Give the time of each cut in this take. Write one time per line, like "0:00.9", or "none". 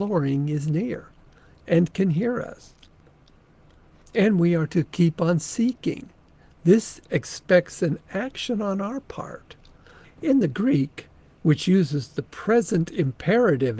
0:10.0